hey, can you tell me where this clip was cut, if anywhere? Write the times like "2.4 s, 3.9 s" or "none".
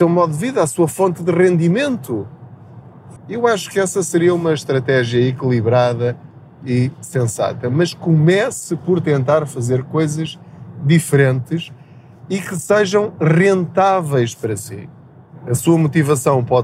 3.2 s